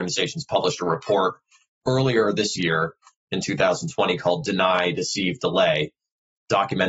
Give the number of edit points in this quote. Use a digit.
0